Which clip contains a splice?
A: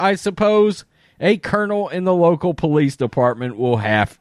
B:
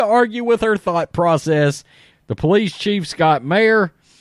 B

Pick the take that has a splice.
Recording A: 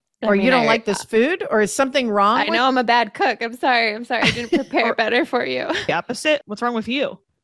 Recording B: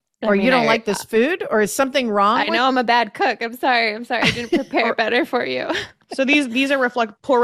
A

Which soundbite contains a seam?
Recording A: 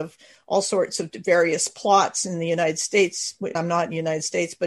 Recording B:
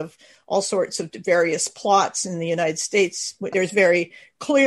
B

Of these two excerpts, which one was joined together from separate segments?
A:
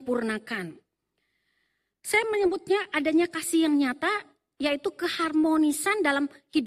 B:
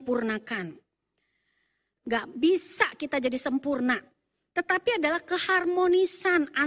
B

